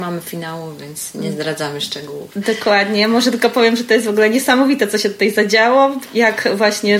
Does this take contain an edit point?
no; 0 cuts

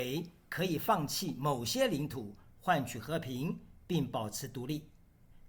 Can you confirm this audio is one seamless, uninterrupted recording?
yes; 0 cuts

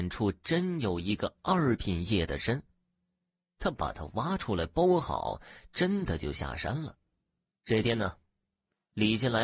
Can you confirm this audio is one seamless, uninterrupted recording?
yes; 0 cuts

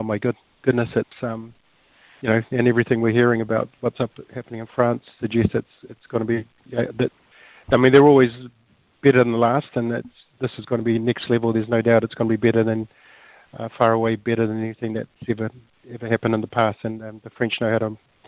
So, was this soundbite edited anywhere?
no; 0 cuts

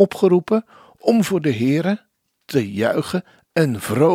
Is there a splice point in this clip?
yes; 1 cut; at 2.2 s

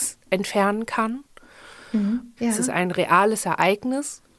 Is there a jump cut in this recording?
yes; 1 cut; at 2.4 s

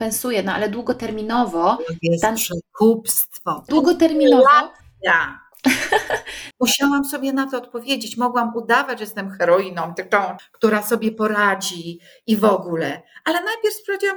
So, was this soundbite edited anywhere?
yes; 3 cuts; at 3.7 s, 6.5 s, 10.4 s

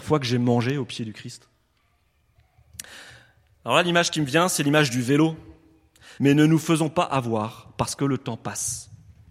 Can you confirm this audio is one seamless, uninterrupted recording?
no; 1 cut; at 6.2 s

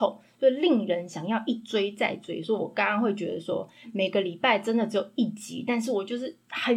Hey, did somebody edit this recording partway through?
no; 0 cuts

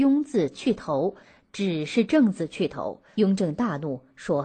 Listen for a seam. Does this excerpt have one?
yes; 1 cut; at 3.1 s

